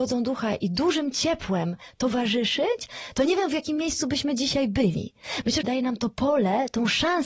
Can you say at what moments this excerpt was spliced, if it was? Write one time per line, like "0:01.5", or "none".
0:05.6

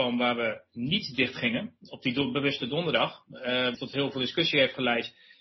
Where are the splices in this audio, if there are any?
0:01.8
0:03.7

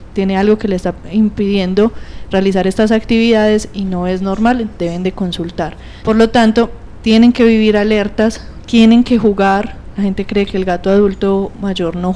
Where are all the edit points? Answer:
0:06.0

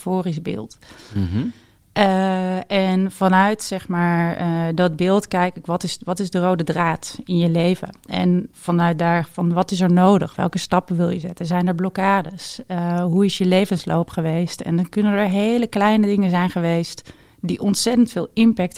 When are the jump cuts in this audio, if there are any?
none

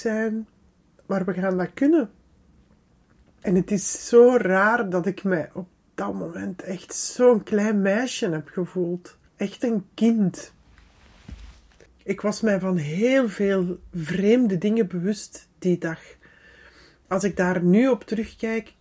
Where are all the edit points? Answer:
0:09.3

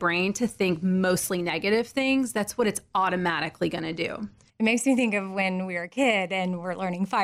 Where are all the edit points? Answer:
0:04.5

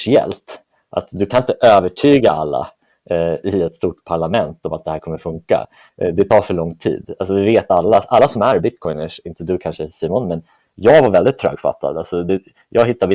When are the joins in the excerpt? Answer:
none

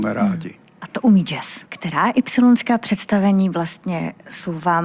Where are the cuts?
0:01.7

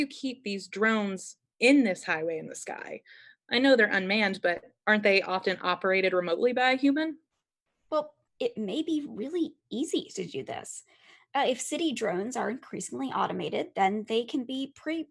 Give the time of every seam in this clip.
0:08.3

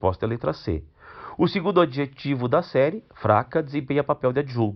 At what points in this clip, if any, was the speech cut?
none

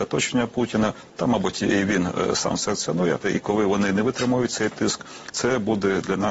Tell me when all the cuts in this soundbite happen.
0:03.2

